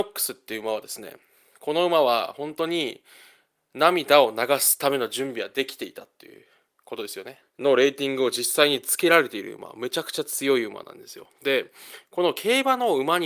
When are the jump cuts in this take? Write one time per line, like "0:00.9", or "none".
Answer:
0:07.4